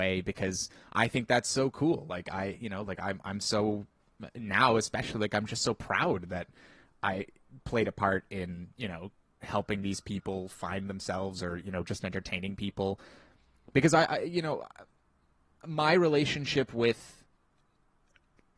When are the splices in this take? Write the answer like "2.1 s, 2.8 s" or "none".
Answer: none